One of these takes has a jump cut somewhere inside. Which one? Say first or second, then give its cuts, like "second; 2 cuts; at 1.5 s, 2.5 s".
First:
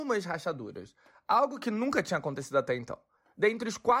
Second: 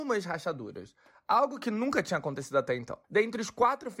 second; 1 cut; at 3.0 s